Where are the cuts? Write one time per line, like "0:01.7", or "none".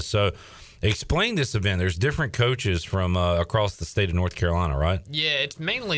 none